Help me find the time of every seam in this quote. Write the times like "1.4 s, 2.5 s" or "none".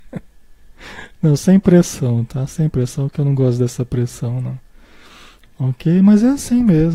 none